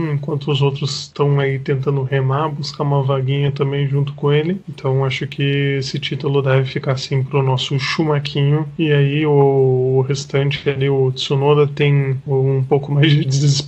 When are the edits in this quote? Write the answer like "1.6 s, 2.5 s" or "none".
4.6 s